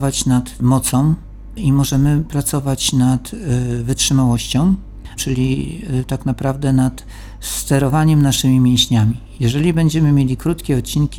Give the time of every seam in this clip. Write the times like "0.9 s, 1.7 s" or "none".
5.2 s